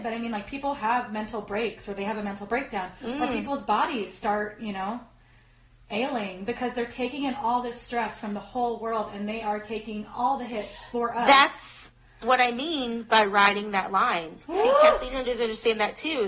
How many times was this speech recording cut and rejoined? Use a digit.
0